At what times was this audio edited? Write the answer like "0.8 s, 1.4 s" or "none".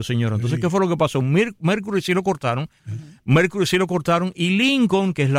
2.8 s